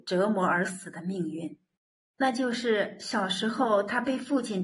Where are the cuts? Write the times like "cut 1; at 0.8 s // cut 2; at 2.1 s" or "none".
cut 1; at 2.1 s